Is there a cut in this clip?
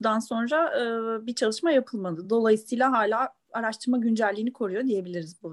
no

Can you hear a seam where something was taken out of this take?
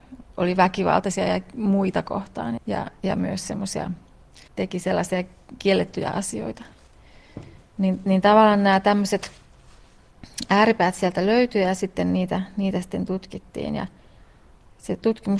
yes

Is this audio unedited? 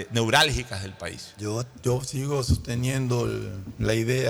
no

